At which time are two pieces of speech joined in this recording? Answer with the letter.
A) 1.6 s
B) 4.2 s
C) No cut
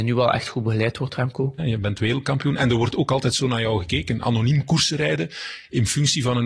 A